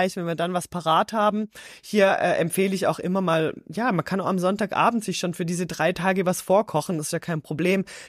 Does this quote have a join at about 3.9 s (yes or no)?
no